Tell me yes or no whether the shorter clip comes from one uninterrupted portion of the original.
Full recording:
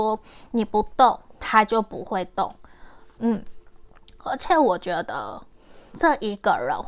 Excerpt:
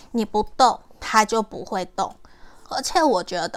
no